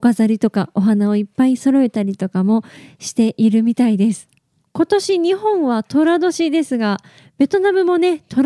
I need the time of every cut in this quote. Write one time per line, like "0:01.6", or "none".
0:04.6